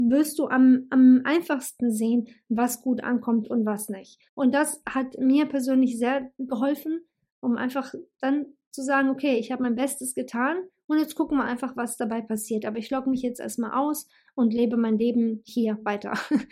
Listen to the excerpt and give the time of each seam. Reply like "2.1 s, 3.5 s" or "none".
4.3 s